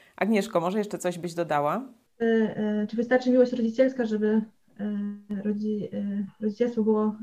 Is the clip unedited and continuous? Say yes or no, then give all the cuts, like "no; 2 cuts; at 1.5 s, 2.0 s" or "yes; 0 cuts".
yes; 0 cuts